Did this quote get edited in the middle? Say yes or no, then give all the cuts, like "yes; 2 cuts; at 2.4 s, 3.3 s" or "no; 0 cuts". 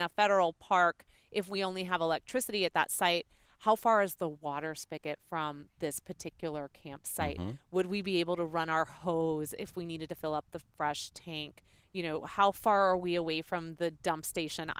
no; 0 cuts